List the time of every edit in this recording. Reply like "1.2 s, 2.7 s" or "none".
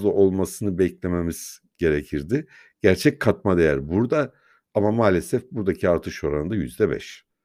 none